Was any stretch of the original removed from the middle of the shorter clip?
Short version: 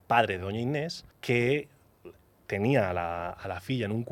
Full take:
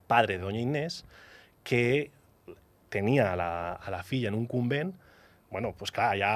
yes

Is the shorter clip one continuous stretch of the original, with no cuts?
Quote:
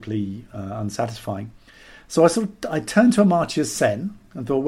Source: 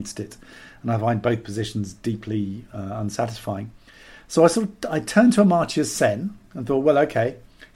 yes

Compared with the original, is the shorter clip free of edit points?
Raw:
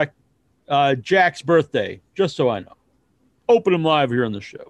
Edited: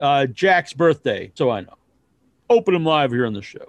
no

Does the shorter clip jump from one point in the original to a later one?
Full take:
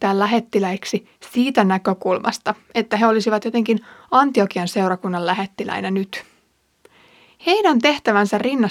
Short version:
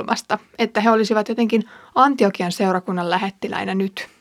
no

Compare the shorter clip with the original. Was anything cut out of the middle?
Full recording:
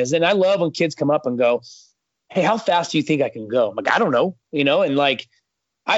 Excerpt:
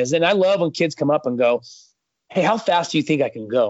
no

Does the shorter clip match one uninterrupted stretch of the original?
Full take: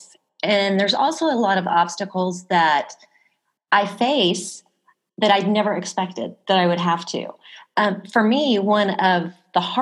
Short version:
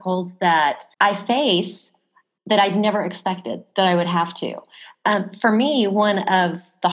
no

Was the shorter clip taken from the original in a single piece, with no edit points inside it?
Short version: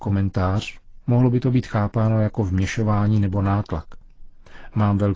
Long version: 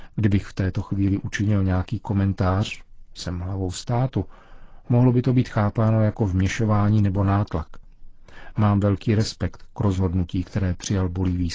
no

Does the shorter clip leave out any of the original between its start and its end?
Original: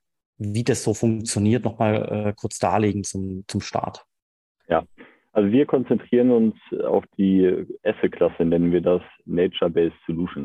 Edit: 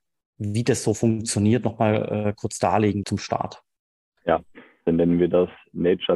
yes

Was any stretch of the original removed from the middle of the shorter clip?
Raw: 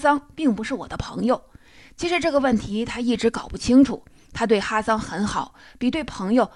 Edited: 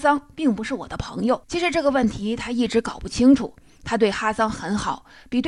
yes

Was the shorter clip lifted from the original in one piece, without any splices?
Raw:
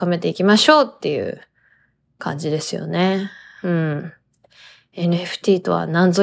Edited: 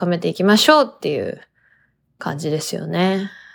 yes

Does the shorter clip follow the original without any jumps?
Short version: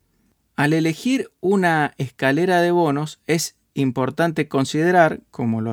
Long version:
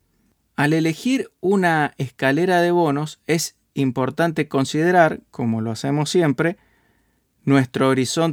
yes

